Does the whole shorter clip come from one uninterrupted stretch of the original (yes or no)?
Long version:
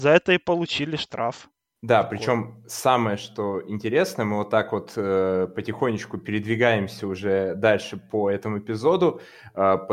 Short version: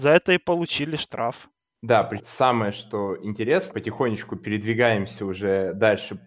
no